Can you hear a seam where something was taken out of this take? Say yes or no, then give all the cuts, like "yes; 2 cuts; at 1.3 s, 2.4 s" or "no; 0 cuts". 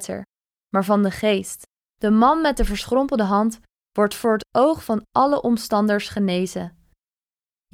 yes; 1 cut; at 1.8 s